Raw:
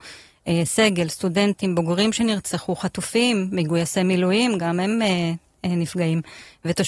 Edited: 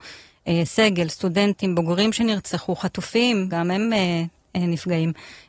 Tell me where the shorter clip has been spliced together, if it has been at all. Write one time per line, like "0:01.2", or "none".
0:03.5